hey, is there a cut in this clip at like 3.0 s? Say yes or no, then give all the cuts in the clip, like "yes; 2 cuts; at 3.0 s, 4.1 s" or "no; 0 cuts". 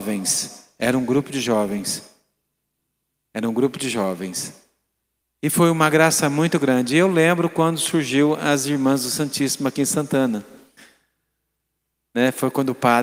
no; 1 cut; at 5.2 s